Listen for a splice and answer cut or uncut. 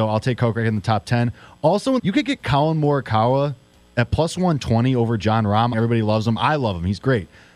cut